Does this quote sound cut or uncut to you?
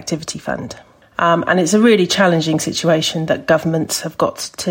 cut